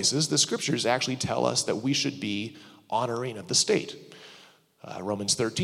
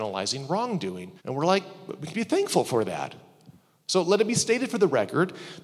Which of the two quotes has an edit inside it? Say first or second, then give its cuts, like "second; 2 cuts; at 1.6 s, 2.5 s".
second; 1 cut; at 1.2 s